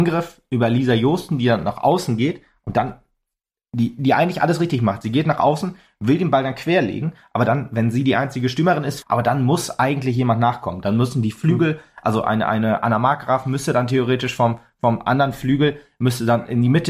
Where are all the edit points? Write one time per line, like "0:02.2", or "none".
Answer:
0:09.0